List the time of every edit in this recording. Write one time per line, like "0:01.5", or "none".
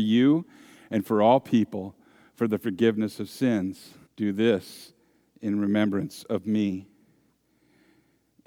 0:04.1